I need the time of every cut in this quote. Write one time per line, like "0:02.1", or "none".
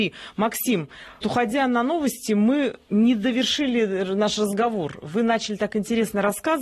0:01.2